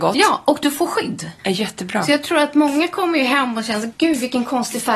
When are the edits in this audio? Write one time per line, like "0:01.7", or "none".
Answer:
0:01.4
0:03.9